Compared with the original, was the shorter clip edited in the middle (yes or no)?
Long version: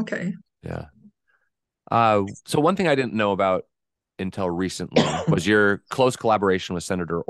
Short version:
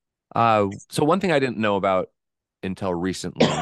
no